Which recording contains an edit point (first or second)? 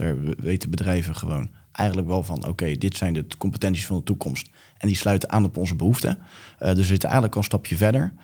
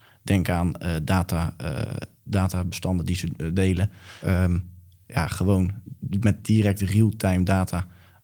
second